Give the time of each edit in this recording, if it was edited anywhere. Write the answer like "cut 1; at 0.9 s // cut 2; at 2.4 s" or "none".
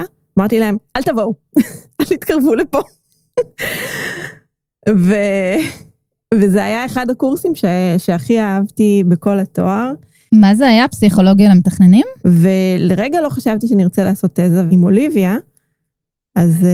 cut 1; at 12.2 s // cut 2; at 14.7 s

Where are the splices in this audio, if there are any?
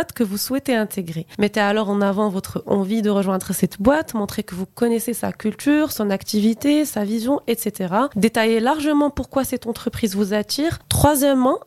none

